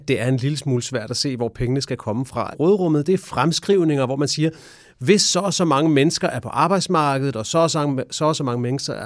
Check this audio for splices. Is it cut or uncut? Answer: cut